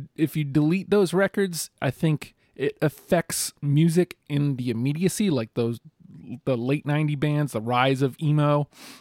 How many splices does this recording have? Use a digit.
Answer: 0